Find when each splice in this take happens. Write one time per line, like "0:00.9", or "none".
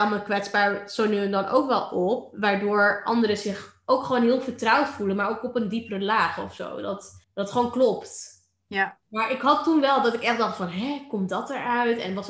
0:07.2